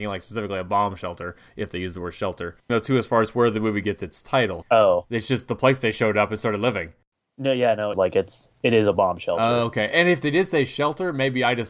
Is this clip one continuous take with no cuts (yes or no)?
no